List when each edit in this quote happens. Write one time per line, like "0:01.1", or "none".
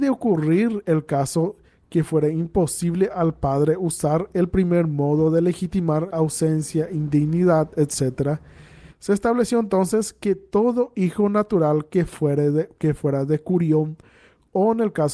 0:06.1
0:08.9